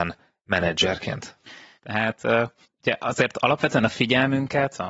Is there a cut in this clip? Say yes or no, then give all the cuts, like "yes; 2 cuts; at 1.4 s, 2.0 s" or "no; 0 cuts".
yes; 1 cut; at 1.8 s